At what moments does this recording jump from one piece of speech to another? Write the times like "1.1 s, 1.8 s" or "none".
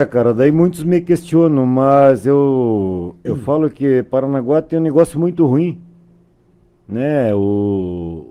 none